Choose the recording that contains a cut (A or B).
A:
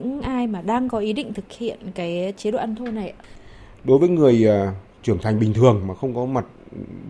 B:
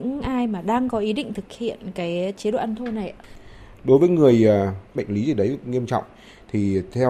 B